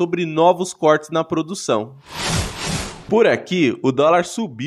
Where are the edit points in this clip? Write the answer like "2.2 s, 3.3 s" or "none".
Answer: 3.1 s